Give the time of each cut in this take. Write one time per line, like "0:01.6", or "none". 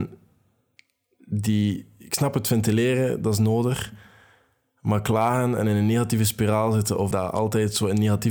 0:07.1